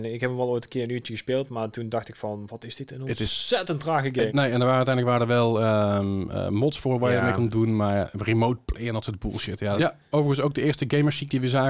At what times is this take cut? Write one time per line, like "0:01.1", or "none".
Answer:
0:04.3
0:09.8